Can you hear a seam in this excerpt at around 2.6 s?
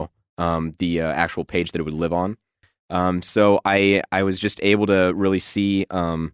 no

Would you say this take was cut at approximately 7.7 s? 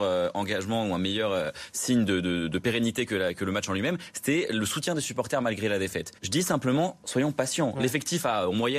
no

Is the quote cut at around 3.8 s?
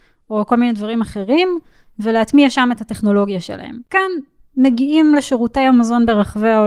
yes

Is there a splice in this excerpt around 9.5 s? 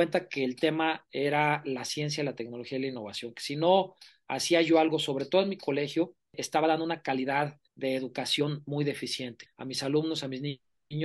yes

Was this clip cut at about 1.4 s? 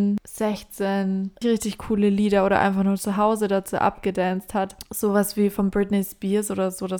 yes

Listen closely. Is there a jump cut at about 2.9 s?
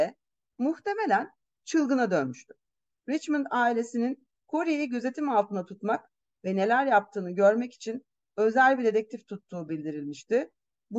yes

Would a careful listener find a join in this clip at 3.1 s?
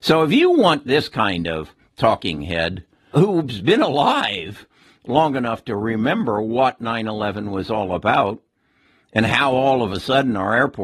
yes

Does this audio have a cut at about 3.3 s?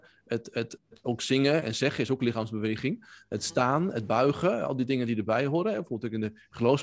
no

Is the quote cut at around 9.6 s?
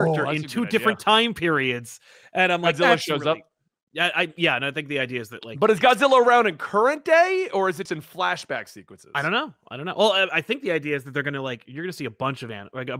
no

